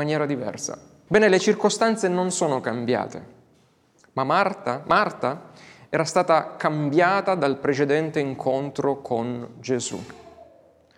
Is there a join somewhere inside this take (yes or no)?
yes